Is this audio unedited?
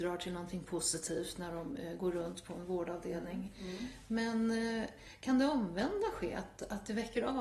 yes; 0 cuts

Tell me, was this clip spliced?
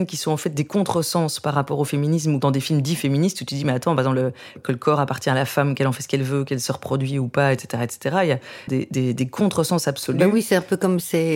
yes; 1 cut; at 8.7 s

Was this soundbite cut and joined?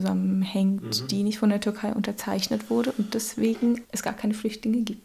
yes; 1 cut; at 3.8 s

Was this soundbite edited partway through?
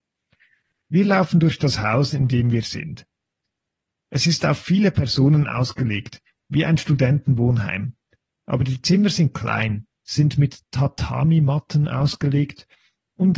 yes; 1 cut; at 10.0 s

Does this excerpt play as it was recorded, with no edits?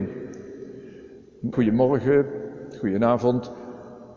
no; 1 cut; at 1.5 s

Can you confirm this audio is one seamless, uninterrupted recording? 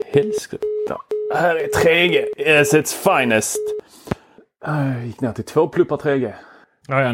yes; 0 cuts

